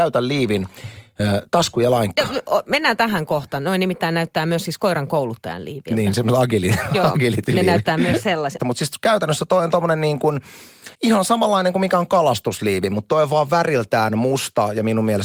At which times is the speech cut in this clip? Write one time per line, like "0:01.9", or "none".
0:08.6
0:10.9